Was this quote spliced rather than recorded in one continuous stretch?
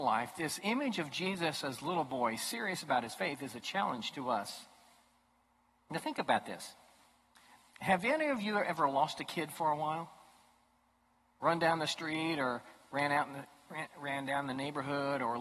no; 0 cuts

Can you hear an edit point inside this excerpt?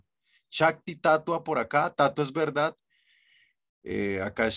no; 0 cuts

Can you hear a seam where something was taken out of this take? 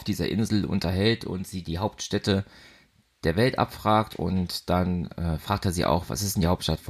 yes; 1 cut; at 1.6 s

